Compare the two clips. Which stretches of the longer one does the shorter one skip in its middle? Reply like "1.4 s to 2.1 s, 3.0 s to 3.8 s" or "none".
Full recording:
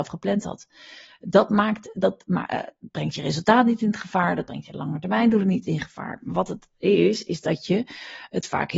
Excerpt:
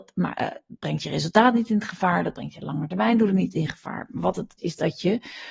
6.7 s to 7.2 s